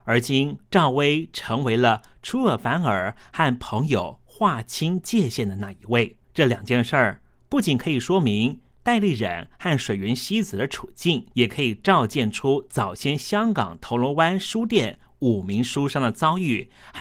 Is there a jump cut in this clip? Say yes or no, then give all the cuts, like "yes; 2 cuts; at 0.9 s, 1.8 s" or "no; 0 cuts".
yes; 2 cuts; at 6.2 s, 11.3 s